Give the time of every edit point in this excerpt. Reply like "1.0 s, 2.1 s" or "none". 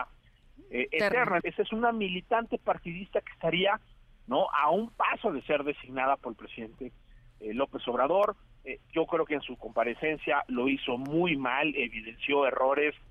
1.4 s